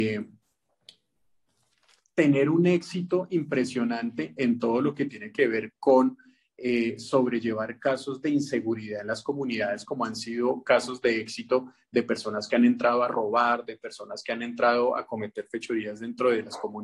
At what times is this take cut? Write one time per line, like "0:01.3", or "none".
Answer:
none